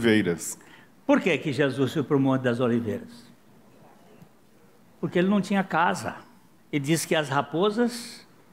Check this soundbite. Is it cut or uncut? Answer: cut